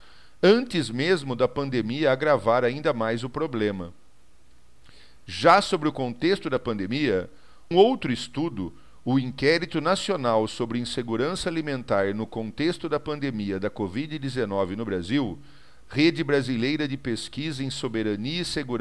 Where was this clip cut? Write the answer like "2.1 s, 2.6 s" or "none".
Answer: 7.7 s, 15.8 s

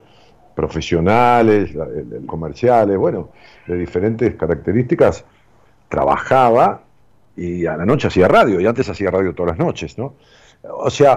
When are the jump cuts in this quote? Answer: 2.3 s

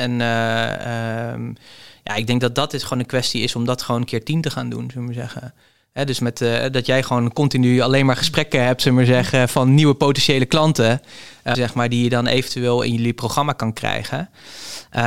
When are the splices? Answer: 11.5 s

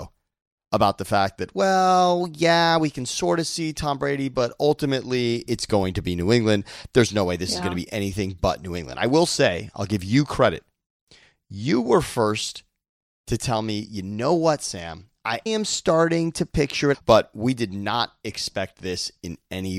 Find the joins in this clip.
15.5 s, 16.9 s

